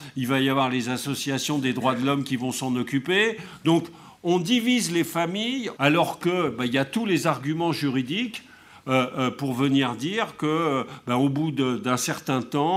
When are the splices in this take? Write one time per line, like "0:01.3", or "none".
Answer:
0:05.8